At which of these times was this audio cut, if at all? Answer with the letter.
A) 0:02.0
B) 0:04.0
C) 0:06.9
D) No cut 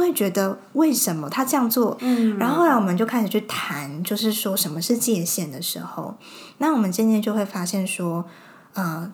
A